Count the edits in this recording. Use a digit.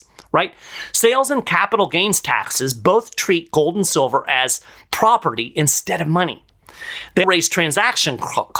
1